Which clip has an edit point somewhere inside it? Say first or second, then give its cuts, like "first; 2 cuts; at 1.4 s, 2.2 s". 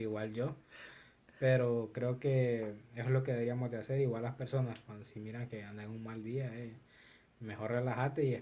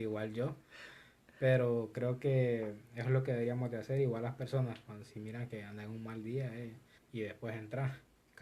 second; 1 cut; at 7.0 s